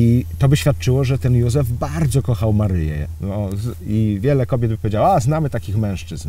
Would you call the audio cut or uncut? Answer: cut